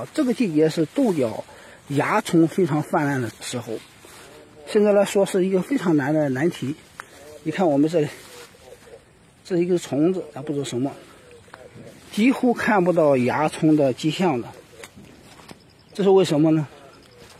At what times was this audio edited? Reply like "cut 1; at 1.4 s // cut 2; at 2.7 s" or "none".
cut 1; at 3.3 s